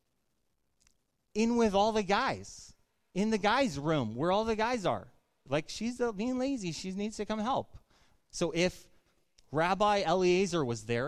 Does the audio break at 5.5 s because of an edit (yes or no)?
yes